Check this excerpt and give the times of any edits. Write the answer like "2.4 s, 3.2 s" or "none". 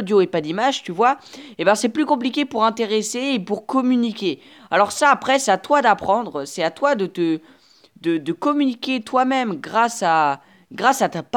none